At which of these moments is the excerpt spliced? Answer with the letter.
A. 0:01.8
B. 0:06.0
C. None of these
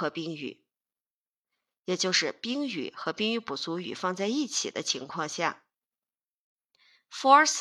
C